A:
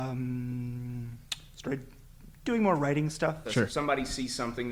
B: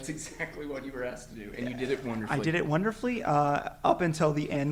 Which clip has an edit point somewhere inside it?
A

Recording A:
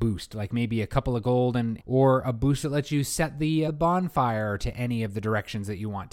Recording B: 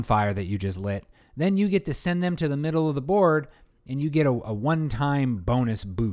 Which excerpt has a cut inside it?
A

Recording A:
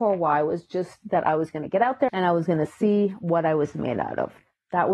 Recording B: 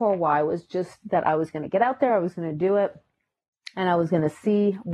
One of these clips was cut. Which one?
A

